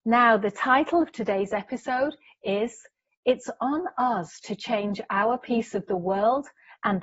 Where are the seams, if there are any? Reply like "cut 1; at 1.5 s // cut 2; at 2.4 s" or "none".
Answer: none